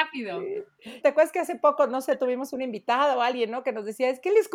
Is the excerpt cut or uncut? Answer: cut